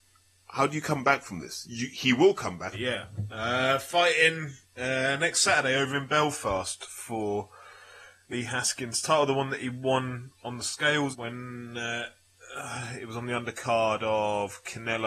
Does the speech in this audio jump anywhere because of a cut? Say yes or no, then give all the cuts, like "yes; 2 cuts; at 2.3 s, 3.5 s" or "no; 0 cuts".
yes; 3 cuts; at 2.7 s, 4.6 s, 11.1 s